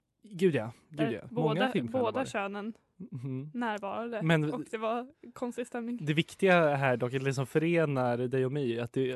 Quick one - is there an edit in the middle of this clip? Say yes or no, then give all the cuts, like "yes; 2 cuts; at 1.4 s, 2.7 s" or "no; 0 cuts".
no; 0 cuts